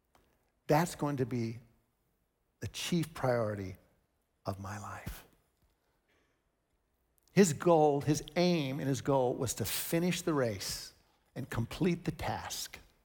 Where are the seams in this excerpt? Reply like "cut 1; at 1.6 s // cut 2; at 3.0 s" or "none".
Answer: none